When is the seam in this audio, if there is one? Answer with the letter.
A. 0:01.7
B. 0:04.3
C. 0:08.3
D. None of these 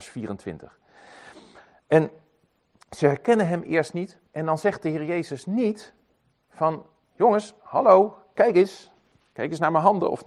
B